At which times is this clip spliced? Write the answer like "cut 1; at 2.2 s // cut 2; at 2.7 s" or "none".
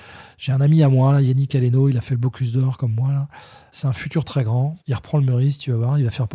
cut 1; at 4.8 s